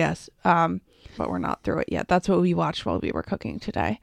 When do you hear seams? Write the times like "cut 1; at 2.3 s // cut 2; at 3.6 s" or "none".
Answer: cut 1; at 1.2 s